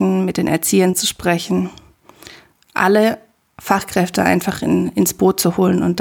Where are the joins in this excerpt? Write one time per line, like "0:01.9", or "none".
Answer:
none